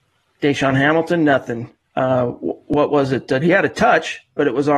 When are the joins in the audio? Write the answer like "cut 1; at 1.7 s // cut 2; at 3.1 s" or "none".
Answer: cut 1; at 3.4 s